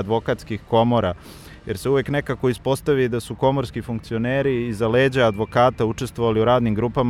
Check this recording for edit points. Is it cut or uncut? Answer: uncut